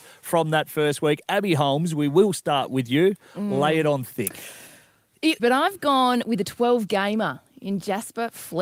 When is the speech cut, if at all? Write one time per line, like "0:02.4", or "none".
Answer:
0:05.4